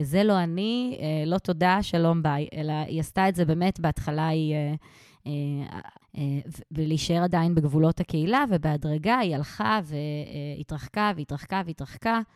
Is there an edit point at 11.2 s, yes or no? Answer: no